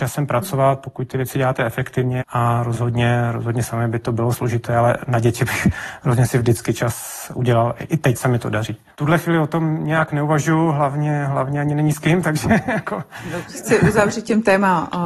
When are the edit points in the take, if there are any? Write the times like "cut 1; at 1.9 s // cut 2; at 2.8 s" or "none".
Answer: cut 1; at 2.2 s // cut 2; at 8.9 s